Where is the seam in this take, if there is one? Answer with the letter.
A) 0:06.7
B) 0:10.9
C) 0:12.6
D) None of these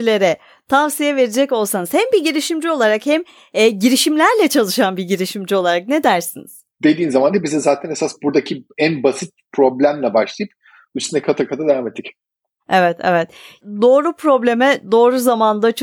A